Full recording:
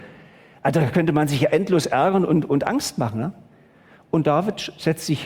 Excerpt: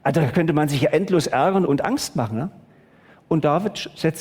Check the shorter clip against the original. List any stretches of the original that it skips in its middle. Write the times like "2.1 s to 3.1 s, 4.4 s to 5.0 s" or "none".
2.2 s to 2.5 s